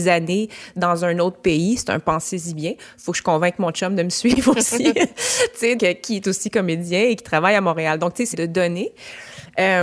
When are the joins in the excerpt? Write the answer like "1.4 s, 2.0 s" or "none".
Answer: 5.8 s, 8.3 s